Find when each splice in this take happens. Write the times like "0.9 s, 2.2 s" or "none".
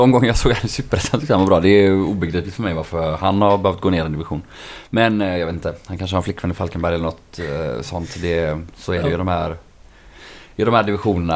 none